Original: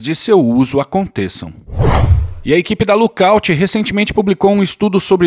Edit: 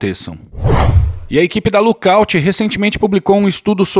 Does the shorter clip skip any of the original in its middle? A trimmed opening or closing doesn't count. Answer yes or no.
no